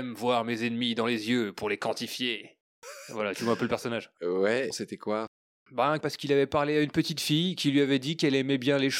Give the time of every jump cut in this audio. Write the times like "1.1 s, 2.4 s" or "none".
4.7 s, 6.0 s